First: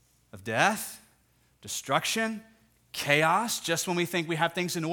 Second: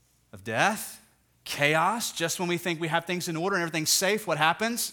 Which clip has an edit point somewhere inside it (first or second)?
second